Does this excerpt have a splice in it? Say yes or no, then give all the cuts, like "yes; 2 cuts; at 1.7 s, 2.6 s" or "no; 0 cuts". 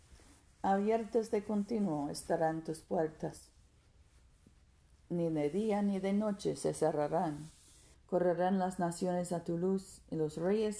yes; 1 cut; at 7.9 s